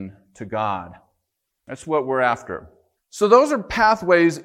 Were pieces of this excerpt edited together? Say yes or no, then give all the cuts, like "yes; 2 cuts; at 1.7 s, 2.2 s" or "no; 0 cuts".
yes; 2 cuts; at 1.6 s, 3.0 s